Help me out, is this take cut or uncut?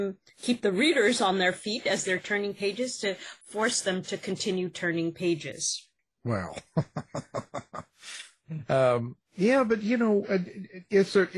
uncut